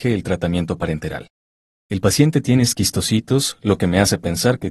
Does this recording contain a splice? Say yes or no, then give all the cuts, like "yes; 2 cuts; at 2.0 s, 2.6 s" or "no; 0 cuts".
yes; 1 cut; at 1.8 s